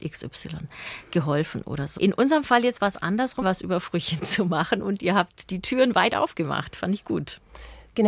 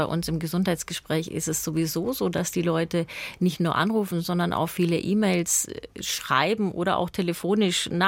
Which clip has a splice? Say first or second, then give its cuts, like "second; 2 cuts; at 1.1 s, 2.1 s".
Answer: first; 2 cuts; at 2.0 s, 3.4 s